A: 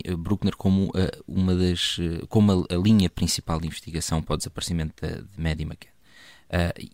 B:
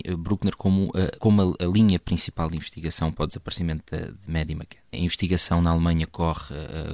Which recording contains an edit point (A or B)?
B